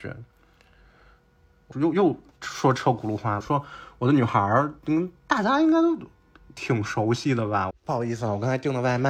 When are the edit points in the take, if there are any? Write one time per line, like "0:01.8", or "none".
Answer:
0:01.7
0:03.4
0:07.7

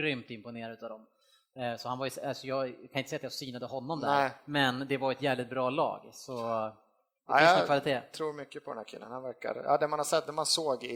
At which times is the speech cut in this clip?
none

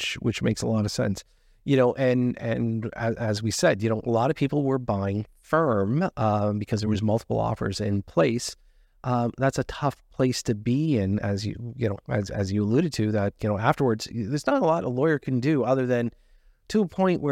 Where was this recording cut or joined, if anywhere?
0:09.4

